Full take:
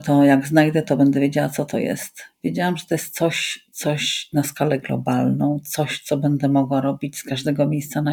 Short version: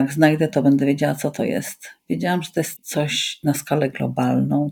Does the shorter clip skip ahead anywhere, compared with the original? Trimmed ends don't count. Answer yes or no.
yes